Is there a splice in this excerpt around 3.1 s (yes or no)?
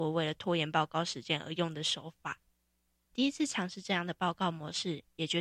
yes